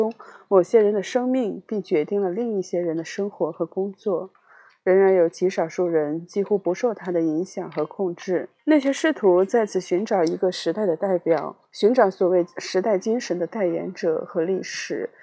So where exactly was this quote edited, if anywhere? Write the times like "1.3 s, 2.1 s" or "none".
8.6 s, 11.6 s